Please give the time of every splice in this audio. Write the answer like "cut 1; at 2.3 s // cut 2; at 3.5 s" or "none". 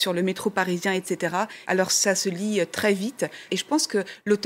cut 1; at 1.6 s // cut 2; at 3.5 s